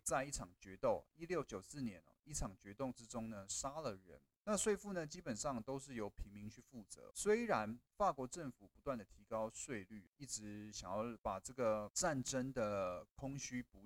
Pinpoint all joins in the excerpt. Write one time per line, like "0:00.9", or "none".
0:04.4